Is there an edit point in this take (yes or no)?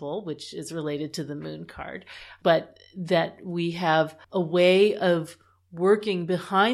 yes